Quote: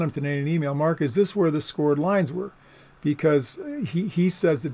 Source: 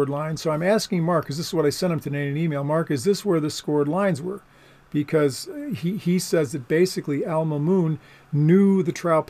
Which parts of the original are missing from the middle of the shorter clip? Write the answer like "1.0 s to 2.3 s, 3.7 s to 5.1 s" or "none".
none

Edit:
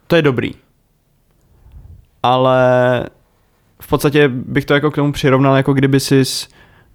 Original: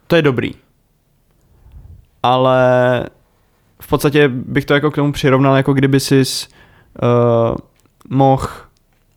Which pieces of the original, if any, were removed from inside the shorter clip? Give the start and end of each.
none

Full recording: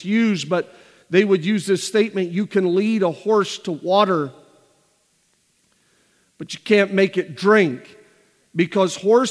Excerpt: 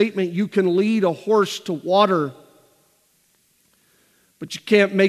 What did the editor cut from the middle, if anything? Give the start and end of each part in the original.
none

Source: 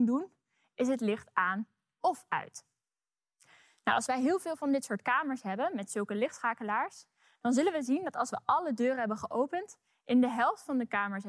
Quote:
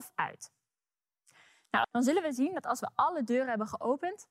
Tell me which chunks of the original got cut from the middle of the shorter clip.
4.0 s to 7.3 s

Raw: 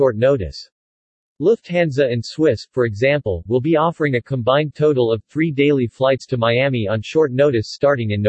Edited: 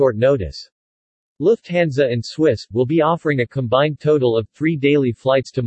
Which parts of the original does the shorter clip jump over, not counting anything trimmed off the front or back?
2.7 s to 3.4 s

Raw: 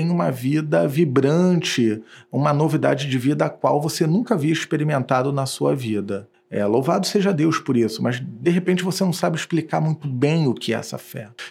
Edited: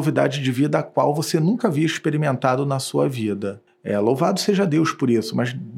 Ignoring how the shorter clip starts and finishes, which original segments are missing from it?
none

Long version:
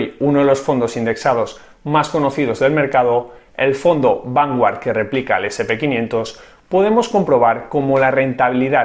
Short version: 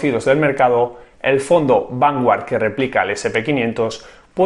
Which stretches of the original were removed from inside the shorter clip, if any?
none

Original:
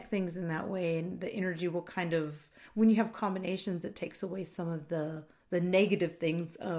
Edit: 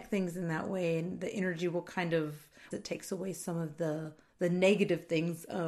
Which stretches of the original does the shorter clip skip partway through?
2.7 s to 3.8 s

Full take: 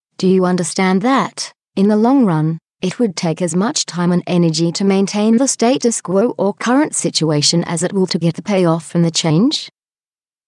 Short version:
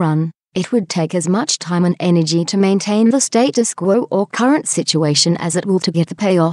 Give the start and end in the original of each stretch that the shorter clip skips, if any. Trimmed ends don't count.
none

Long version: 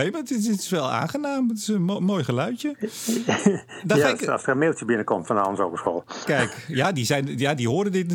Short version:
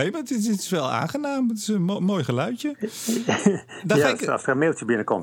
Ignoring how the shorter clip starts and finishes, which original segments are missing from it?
none

